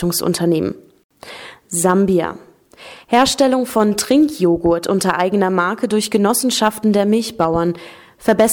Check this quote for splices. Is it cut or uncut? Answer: uncut